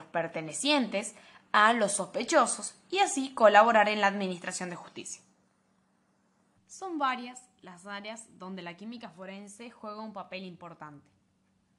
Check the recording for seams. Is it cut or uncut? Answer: cut